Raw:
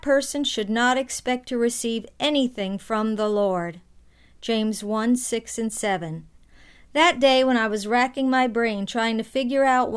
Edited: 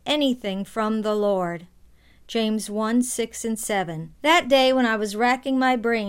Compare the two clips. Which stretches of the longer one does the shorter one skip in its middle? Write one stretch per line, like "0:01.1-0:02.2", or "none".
0:06.3-0:06.9